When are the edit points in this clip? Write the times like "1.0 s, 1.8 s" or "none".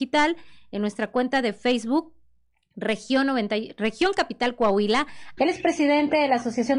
5.4 s